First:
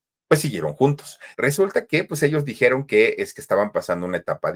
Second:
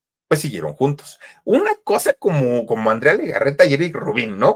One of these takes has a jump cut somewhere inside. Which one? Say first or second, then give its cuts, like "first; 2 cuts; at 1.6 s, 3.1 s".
first; 1 cut; at 1.3 s